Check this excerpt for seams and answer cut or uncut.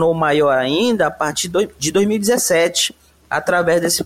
uncut